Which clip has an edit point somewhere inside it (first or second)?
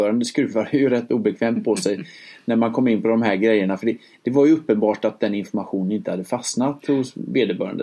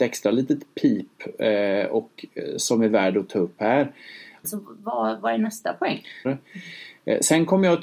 second